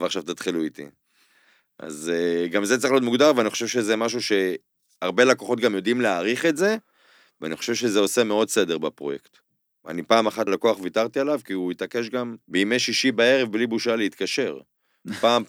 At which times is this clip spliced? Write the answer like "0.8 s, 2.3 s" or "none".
10.5 s, 12.4 s